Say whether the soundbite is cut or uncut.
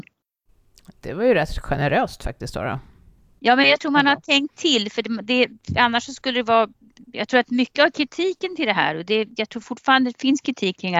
uncut